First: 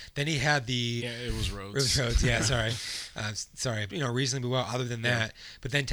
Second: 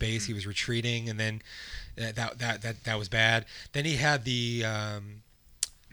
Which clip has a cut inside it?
first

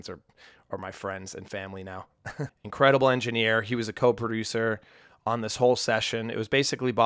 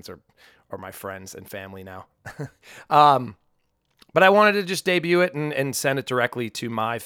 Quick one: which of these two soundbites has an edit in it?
first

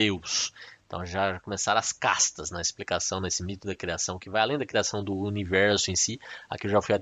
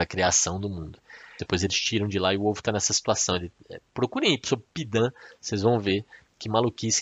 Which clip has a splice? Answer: second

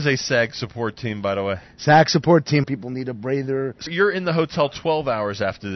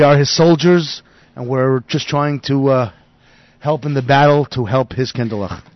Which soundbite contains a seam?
first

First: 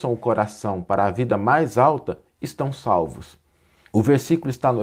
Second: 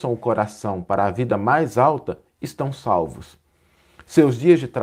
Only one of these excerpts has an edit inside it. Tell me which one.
first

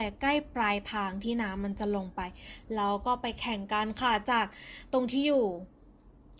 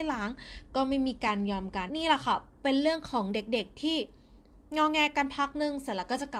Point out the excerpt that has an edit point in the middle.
second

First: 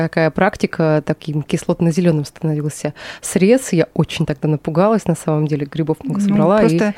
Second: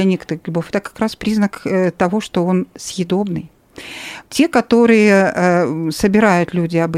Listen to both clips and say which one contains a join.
second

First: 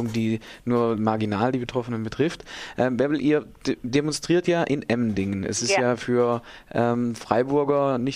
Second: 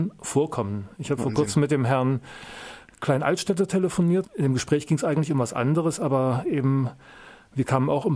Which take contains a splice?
second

